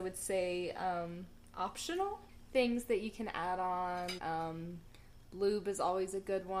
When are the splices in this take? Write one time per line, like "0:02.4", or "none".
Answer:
0:04.2